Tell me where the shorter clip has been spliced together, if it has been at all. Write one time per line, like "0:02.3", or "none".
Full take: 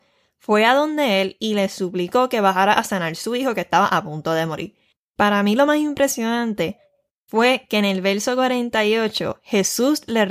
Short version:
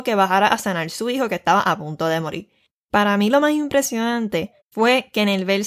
0:04.6

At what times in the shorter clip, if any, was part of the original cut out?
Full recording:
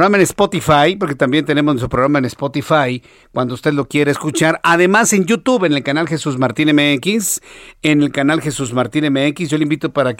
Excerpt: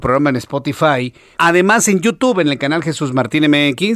0:01.4

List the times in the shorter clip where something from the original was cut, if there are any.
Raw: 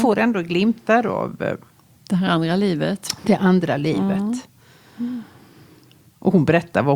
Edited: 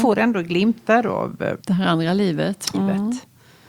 0:01.6
0:02.7

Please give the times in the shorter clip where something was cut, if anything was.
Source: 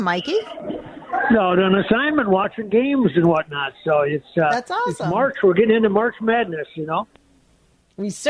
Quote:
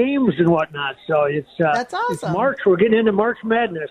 none

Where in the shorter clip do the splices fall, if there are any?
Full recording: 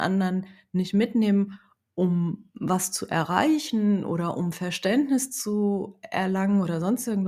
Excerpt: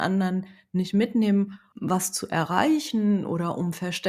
0:01.7

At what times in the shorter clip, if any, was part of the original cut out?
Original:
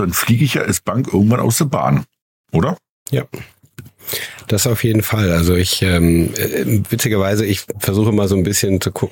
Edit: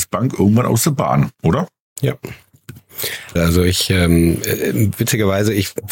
0:01.3
0:03.4

